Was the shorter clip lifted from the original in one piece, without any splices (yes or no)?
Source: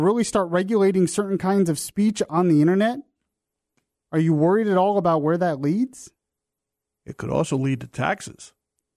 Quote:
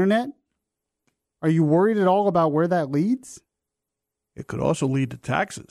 yes